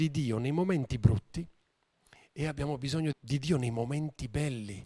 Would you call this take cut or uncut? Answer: cut